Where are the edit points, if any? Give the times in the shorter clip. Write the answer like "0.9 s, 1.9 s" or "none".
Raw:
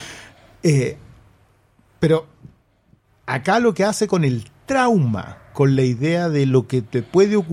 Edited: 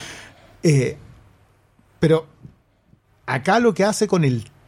none